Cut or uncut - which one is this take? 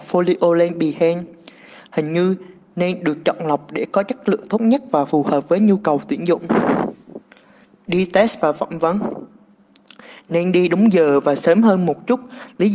uncut